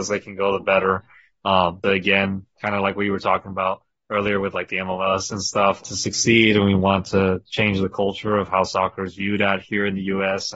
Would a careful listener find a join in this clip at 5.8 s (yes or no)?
yes